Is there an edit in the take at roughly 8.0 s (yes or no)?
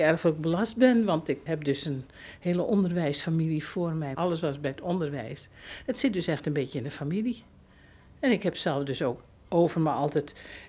no